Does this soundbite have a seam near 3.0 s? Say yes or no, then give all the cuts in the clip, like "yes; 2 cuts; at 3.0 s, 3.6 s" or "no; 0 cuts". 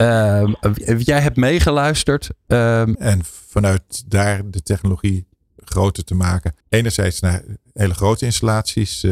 yes; 2 cuts; at 3.0 s, 6.6 s